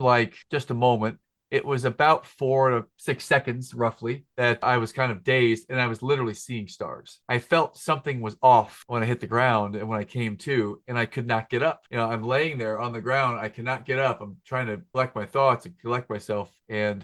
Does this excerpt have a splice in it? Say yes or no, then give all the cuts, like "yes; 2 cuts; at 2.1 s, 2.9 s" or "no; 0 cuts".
no; 0 cuts